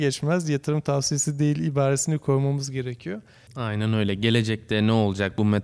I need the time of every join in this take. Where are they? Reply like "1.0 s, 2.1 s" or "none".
3.5 s